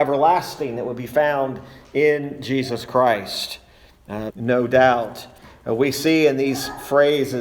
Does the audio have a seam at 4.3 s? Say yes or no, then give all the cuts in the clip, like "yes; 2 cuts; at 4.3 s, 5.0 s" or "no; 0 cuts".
yes; 1 cut; at 4.3 s